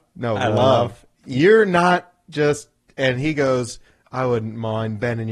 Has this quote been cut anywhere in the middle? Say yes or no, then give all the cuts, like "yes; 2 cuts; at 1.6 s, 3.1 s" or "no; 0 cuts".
yes; 1 cut; at 1.2 s